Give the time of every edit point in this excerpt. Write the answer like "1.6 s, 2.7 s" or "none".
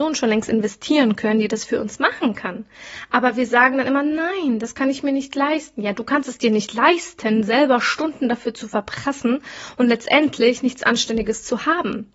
none